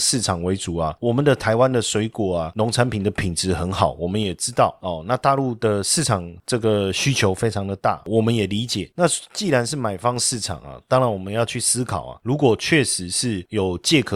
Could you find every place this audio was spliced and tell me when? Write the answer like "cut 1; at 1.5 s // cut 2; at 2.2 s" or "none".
none

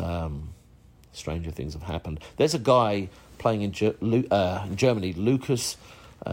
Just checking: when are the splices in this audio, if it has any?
none

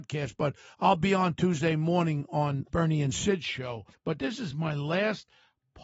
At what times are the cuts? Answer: none

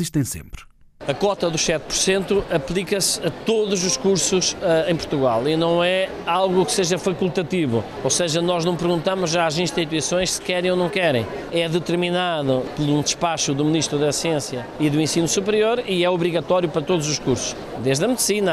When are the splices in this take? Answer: none

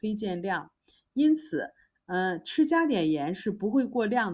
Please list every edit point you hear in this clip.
cut 1; at 1.9 s

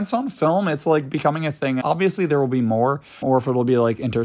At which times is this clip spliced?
cut 1; at 1.8 s // cut 2; at 3.2 s

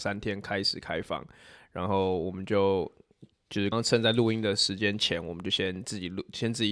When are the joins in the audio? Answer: cut 1; at 3.7 s

